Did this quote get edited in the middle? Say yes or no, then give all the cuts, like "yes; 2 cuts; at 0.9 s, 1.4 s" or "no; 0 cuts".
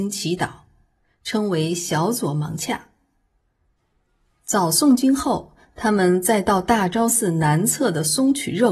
no; 0 cuts